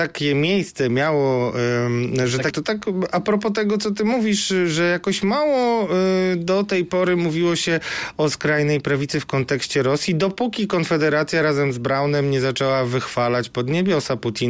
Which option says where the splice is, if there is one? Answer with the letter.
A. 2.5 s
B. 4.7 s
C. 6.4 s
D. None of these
A